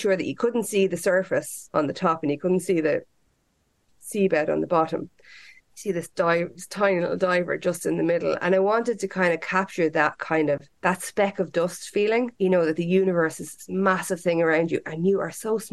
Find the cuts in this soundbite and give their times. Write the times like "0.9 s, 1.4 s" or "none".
5.6 s, 10.8 s, 12.3 s